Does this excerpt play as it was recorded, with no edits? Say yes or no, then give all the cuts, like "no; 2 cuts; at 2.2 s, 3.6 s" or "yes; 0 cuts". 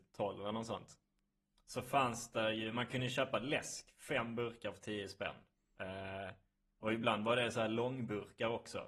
yes; 0 cuts